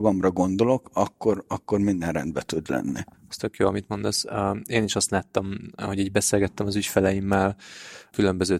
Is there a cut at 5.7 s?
no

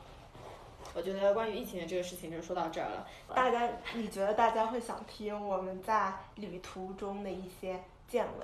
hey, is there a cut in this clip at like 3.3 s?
yes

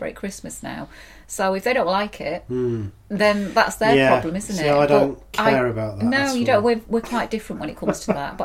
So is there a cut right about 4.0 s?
no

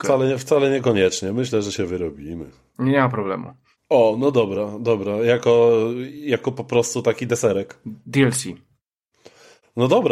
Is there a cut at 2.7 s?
yes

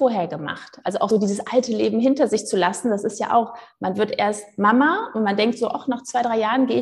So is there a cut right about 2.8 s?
no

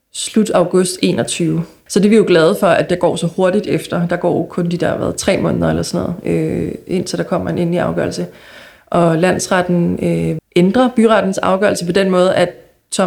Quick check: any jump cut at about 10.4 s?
yes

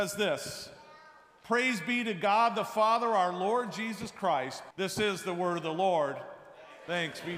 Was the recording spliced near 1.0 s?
no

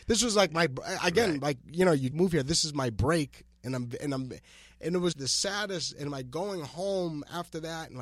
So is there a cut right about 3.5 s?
no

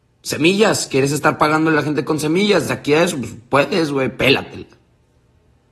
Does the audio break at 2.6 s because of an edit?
no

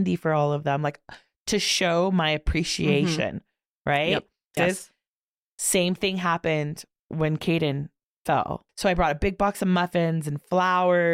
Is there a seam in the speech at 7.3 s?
no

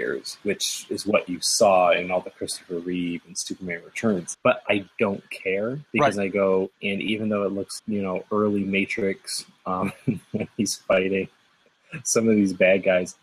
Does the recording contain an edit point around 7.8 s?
yes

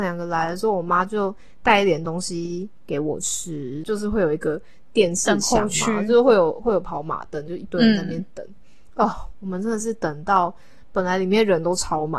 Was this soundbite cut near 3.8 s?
yes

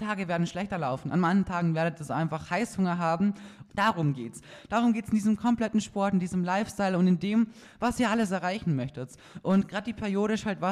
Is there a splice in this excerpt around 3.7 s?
yes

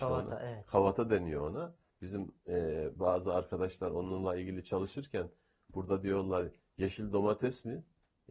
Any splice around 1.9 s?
yes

